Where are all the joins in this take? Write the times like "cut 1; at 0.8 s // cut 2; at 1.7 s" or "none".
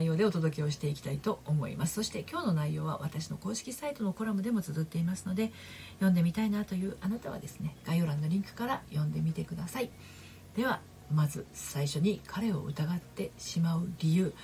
none